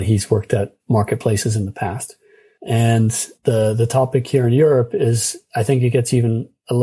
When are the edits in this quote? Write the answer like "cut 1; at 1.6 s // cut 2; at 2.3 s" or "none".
none